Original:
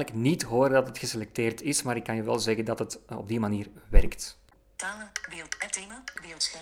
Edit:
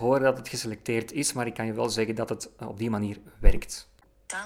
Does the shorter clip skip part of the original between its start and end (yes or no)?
no